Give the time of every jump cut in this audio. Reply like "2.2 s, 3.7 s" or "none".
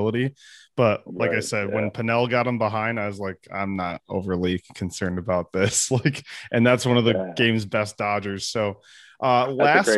none